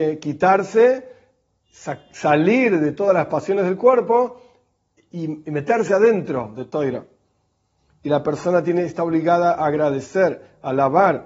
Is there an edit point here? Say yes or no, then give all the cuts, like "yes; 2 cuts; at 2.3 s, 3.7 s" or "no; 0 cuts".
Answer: no; 0 cuts